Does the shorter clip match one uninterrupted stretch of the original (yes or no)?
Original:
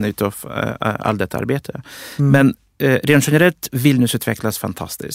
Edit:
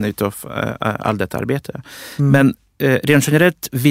yes